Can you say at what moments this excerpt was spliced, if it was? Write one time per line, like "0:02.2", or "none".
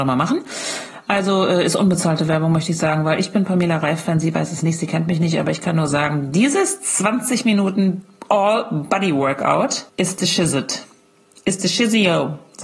0:09.9